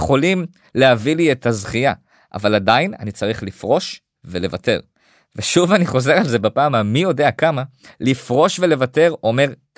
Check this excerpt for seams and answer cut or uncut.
uncut